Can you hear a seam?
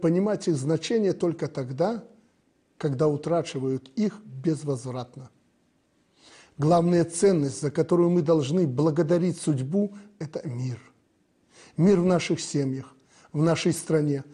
no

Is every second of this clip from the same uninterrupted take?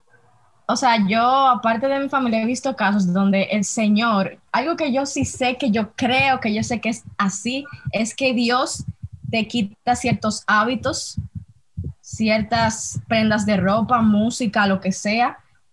yes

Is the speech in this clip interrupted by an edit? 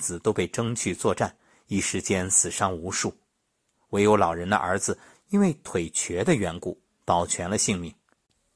yes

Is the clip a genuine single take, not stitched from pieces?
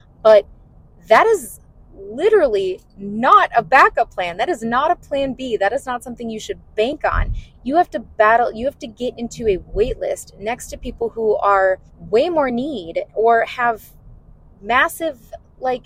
no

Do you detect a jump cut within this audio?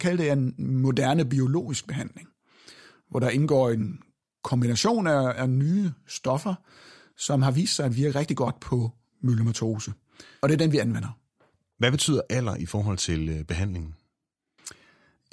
no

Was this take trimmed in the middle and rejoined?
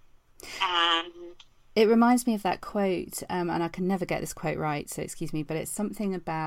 no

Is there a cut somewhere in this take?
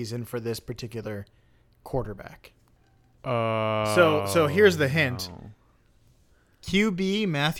no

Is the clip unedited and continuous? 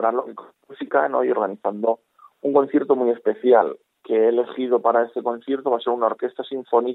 no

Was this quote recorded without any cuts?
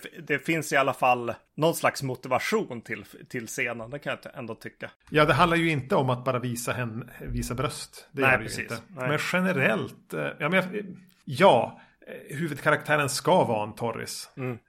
yes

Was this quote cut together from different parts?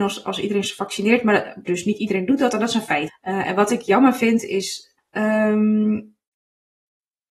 yes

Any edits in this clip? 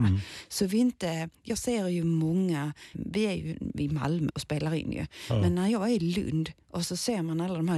yes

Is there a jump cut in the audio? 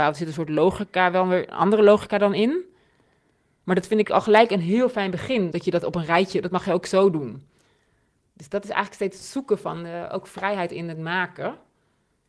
yes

